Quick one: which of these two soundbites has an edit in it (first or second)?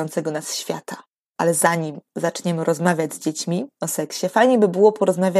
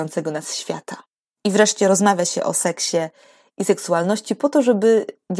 first